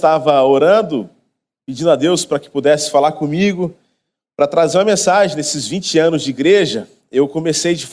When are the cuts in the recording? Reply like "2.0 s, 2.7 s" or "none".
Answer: none